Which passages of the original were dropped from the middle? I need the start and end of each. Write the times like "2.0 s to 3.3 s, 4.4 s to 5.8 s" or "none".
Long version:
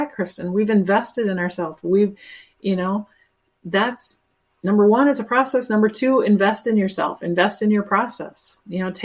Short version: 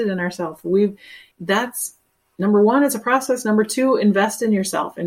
2.5 s to 3.6 s

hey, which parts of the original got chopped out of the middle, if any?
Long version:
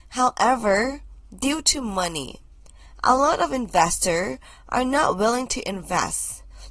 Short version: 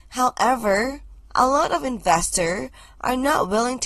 1.3 s to 3.0 s

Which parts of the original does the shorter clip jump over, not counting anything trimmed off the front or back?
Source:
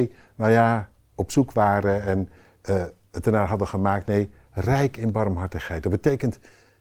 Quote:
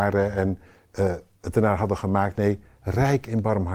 none

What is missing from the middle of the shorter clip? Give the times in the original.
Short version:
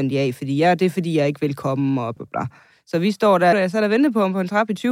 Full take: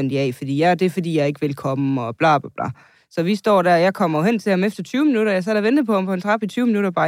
2.2 s to 2.4 s, 3.8 s to 5.3 s

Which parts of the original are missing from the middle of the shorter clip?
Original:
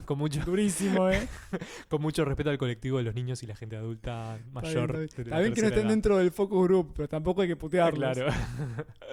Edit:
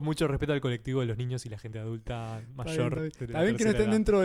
none

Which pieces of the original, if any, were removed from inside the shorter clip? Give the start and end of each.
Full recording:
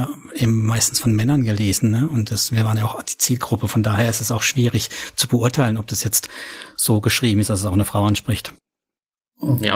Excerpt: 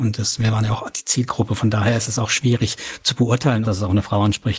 5.8 s to 7.5 s

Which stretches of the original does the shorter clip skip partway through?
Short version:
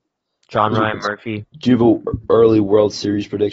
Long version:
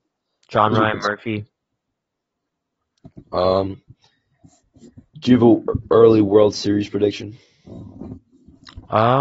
1.4 s to 5.0 s

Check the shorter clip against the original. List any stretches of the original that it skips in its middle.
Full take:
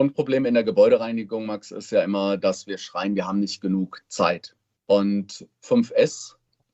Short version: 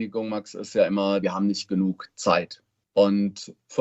2.4 s to 3.1 s

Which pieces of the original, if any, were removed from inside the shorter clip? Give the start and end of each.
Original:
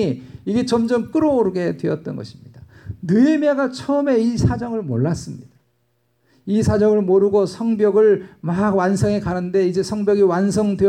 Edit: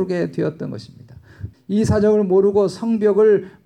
3.0 s to 6.3 s

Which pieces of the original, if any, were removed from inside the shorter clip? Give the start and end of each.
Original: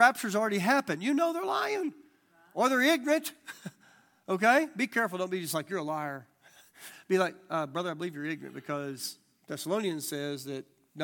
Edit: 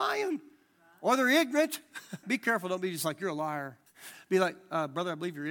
3.8 s to 4.7 s, 6.4 s to 6.7 s

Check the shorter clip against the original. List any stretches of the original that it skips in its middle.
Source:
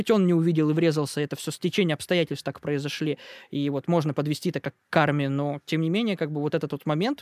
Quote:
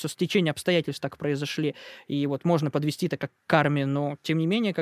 none

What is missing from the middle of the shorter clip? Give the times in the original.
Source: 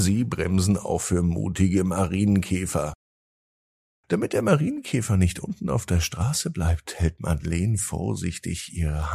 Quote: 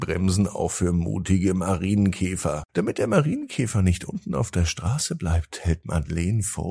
3.0 s to 4.0 s

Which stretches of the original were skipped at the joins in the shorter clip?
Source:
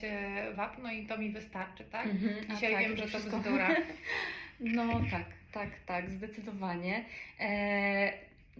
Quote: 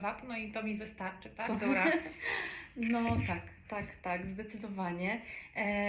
2.0 s to 3.3 s

